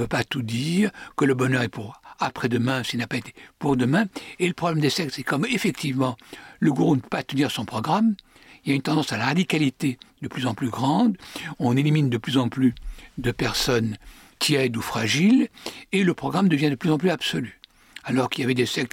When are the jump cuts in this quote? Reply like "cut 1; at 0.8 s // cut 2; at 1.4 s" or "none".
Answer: none